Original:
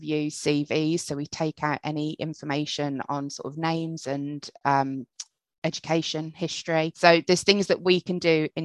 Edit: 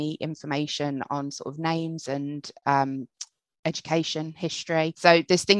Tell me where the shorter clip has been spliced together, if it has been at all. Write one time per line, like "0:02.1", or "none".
none